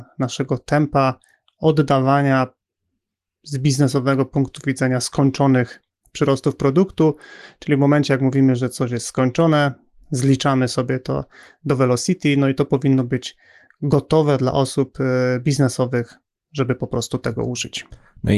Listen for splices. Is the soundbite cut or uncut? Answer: uncut